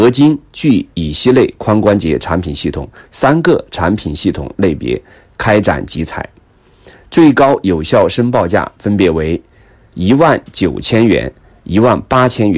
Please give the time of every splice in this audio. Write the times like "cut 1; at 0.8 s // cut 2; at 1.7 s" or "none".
none